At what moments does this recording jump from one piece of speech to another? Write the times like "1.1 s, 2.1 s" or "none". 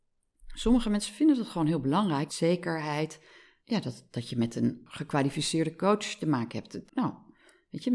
2.3 s, 6.9 s